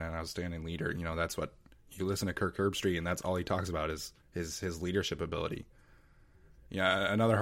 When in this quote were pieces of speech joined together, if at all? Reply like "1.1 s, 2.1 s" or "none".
4.2 s